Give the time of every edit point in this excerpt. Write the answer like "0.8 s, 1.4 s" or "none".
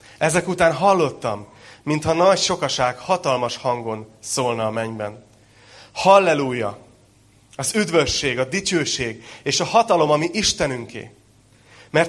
none